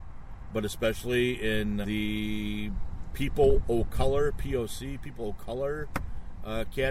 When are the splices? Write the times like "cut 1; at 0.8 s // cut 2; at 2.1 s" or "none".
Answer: cut 1; at 1.8 s